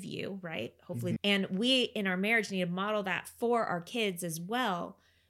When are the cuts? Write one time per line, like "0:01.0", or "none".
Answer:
0:01.2